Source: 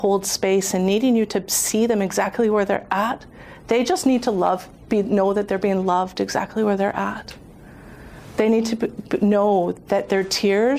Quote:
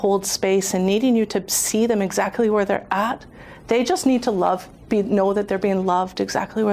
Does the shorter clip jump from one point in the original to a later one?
no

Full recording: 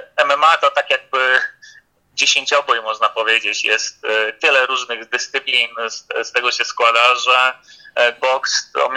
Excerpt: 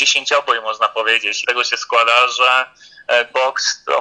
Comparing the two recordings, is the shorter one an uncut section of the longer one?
no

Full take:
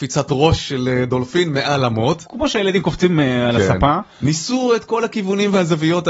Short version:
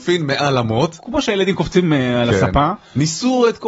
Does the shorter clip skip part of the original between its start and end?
no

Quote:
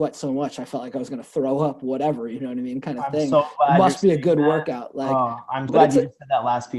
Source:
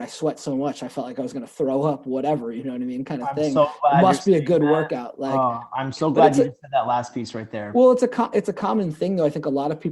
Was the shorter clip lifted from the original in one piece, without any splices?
no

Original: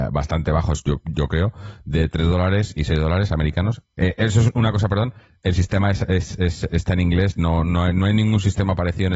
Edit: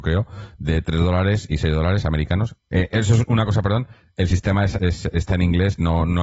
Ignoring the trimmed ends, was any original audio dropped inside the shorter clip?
yes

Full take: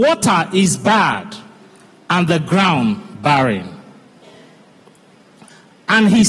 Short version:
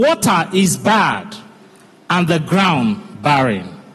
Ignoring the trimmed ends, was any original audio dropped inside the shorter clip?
no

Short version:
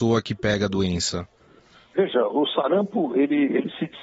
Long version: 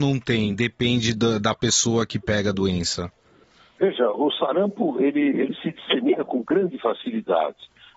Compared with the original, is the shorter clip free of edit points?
yes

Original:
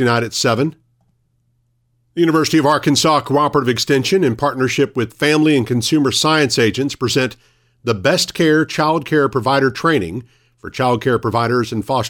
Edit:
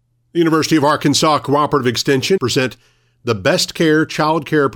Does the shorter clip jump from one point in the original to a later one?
yes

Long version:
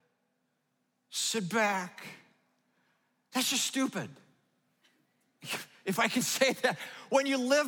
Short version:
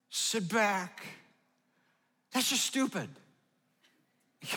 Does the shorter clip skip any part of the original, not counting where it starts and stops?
no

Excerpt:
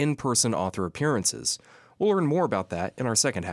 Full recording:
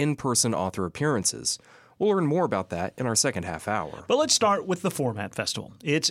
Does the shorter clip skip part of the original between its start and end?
no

